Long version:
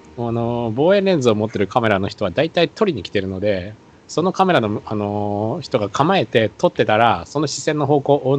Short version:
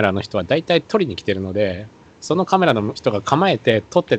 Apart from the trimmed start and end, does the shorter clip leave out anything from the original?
yes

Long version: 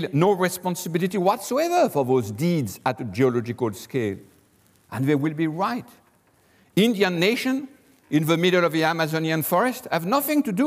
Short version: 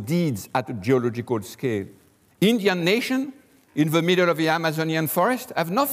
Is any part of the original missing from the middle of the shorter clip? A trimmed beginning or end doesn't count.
yes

